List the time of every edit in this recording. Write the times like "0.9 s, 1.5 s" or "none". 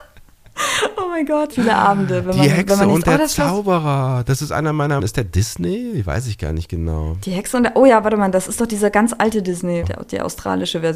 1.5 s, 5.0 s, 9.8 s